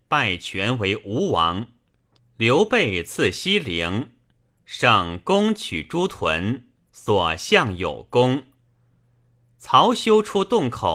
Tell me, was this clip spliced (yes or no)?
yes